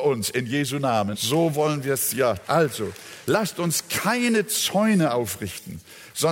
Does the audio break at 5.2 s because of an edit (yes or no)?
no